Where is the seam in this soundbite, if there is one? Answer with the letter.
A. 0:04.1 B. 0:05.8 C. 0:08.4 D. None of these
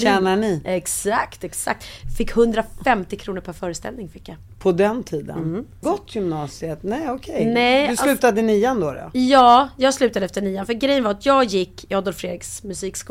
B